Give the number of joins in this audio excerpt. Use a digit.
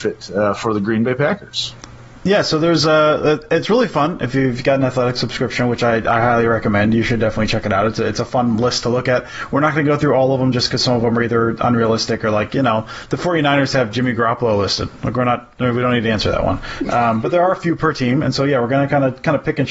0